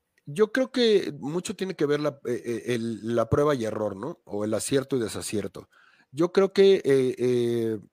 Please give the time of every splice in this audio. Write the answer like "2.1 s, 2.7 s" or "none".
none